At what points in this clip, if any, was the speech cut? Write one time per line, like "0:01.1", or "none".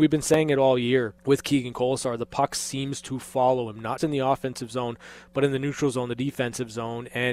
0:01.2
0:04.0